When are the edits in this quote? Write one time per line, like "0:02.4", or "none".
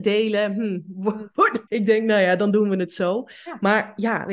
0:01.7